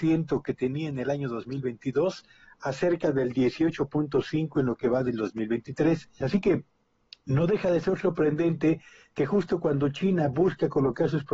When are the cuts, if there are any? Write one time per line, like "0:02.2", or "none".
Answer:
0:06.2